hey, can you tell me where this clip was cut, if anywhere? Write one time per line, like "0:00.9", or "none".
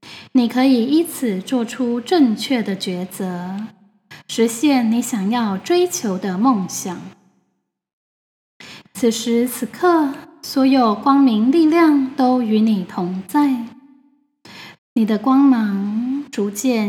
0:08.8
0:14.8